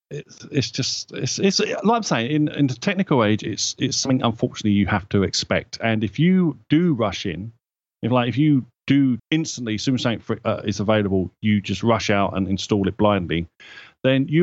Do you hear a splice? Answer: yes; 1 cut; at 9.2 s

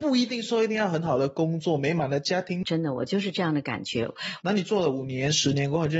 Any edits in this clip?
yes; 2 cuts; at 2.6 s, 4.4 s

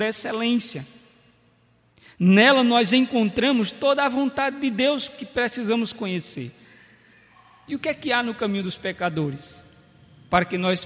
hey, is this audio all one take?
no; 1 cut; at 7.7 s

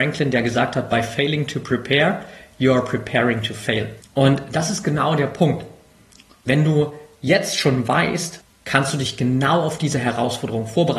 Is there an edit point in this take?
yes; 2 cuts; at 4.0 s, 8.4 s

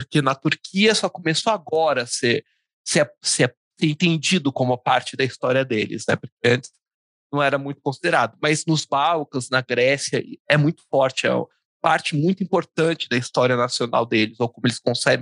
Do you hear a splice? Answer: no; 0 cuts

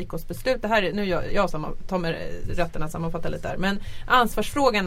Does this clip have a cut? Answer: no; 0 cuts

